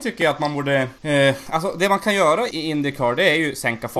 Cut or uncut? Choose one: cut